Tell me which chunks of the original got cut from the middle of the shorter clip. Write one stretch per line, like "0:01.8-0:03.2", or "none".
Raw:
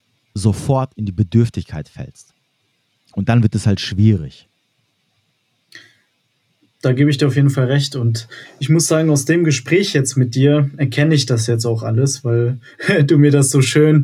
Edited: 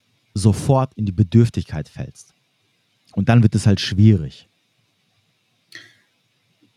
none